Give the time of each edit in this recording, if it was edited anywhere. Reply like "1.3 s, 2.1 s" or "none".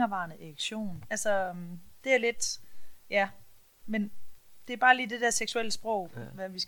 1.0 s